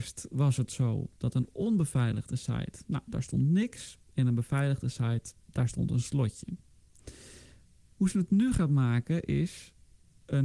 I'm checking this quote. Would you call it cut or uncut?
uncut